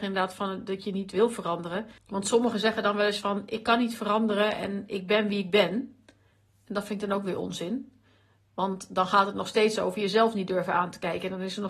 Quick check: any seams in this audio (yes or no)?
yes